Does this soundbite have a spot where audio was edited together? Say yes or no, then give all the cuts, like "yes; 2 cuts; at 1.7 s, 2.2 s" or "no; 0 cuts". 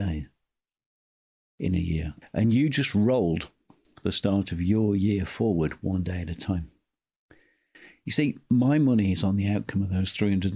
no; 0 cuts